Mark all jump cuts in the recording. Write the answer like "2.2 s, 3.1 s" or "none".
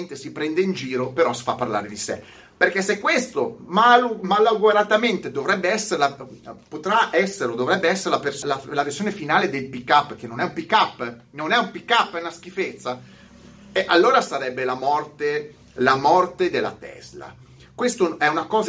8.4 s